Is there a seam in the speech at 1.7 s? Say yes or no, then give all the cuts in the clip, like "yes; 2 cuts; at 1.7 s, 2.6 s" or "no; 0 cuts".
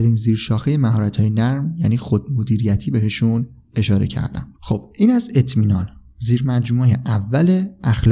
no; 1 cut; at 4.6 s